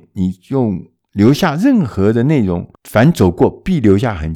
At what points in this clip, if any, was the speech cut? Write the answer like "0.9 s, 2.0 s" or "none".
2.7 s